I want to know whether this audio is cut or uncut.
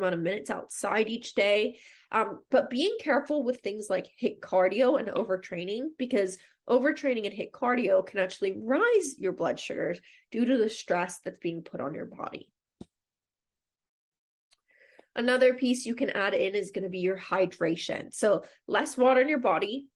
uncut